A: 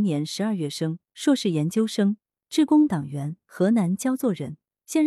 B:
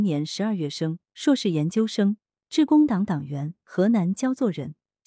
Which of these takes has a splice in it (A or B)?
A